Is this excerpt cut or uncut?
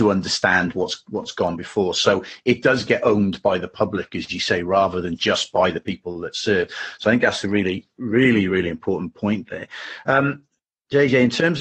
uncut